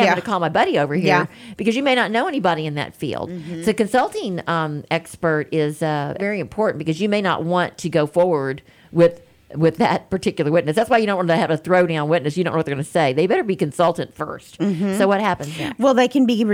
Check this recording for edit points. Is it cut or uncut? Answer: cut